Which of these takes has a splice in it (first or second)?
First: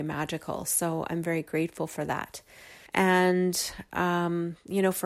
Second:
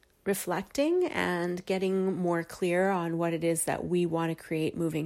first